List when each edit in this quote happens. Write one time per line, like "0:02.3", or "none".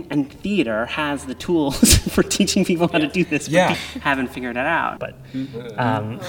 0:03.7
0:05.0

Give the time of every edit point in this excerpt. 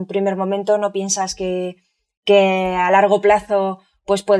none

